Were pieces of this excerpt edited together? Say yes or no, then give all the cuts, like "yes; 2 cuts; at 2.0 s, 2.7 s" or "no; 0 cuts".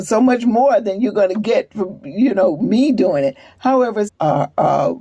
yes; 1 cut; at 4.1 s